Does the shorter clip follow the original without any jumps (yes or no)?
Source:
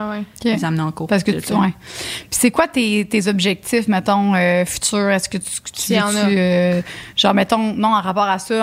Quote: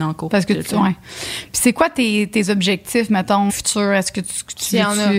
no